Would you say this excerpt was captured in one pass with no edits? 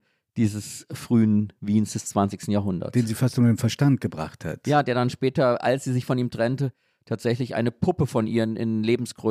yes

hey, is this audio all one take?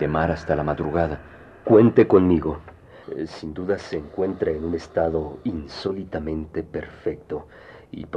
no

